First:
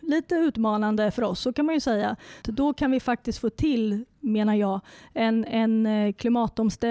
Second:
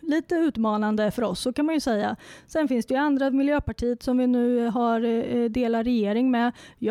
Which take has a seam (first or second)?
first